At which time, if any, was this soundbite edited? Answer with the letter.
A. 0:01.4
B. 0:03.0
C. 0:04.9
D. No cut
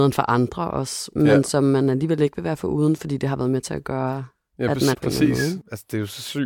C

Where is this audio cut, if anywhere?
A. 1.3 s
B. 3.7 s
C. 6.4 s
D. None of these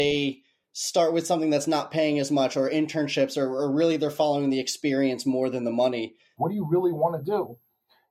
C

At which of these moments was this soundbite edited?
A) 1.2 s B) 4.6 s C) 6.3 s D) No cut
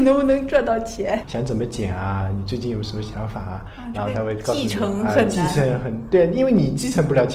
A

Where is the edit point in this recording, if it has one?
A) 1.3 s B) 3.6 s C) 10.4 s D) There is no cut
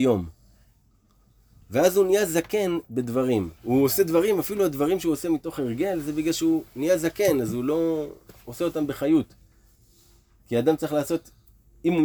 B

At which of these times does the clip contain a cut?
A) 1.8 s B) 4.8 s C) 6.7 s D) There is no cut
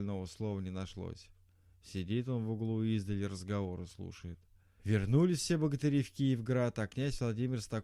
B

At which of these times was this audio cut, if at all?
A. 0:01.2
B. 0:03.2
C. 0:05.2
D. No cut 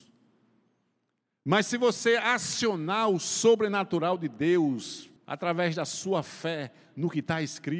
C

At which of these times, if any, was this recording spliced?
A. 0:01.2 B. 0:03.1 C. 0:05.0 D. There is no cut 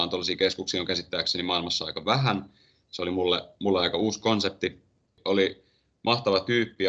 C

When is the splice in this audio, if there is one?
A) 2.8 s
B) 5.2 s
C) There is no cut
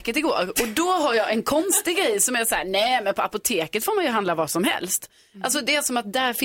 C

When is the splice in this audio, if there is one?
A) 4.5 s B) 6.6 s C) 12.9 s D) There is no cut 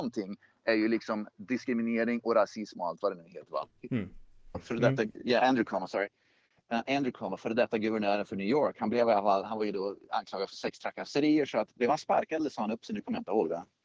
A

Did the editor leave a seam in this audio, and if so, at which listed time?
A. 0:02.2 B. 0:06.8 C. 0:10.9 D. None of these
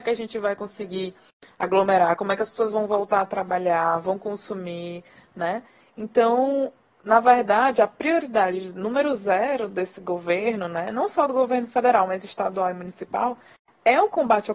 D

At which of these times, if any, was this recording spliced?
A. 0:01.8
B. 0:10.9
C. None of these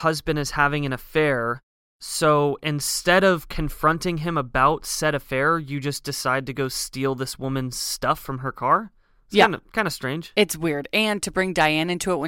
C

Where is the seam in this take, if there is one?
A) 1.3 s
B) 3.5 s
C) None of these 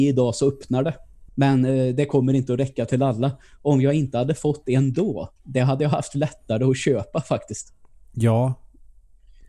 A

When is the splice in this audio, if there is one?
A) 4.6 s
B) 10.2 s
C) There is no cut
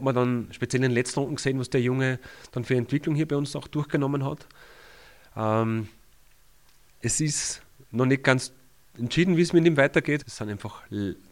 B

